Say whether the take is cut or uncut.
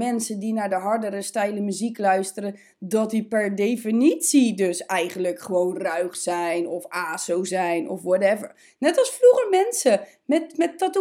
uncut